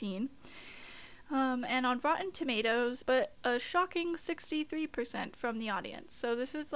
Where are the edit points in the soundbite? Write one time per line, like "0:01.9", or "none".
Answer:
0:03.0